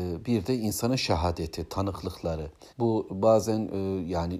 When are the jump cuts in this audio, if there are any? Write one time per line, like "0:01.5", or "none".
0:02.7